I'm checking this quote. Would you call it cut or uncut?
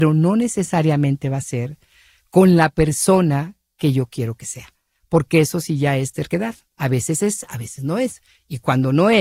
uncut